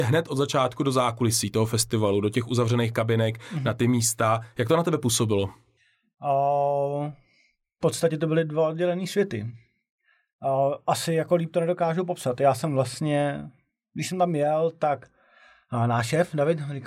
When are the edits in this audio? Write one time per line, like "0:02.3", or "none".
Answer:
none